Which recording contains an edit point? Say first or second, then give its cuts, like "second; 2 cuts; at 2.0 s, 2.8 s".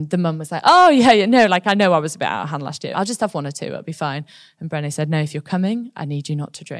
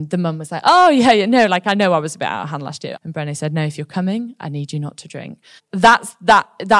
second; 2 cuts; at 2.9 s, 5.6 s